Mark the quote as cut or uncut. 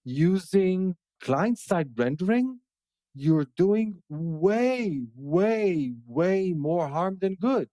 cut